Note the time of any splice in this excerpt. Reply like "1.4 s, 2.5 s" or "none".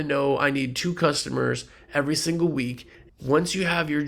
3.1 s